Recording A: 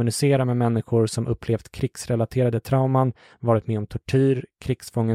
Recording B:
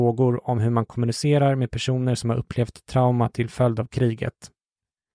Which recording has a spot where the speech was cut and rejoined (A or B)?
A